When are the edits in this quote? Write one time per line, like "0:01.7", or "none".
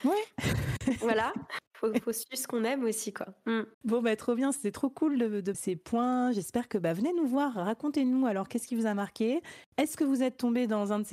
0:03.7
0:05.5